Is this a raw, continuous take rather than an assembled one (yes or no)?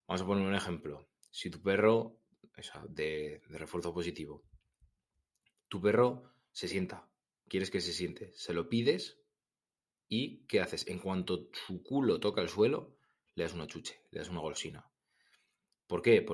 yes